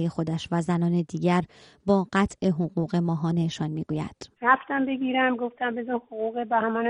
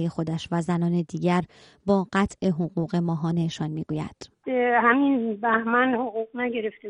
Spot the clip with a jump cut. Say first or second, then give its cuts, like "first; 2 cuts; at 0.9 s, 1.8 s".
first; 1 cut; at 4.4 s